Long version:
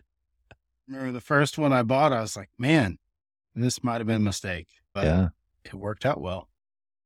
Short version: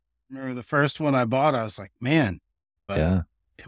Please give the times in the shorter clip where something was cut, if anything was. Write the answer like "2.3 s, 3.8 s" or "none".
2.8 s